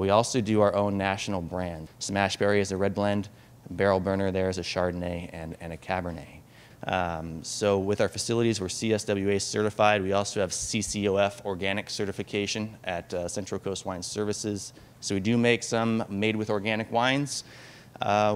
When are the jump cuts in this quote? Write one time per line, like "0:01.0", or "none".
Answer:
0:01.9
0:06.7